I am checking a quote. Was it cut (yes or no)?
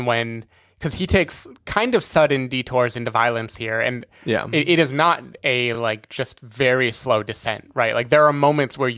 no